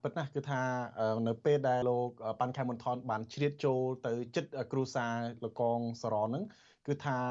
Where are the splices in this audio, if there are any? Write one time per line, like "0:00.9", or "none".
0:01.8